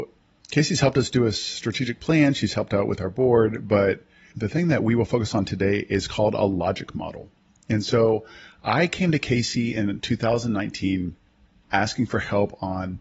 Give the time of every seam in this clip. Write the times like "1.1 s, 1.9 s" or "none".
none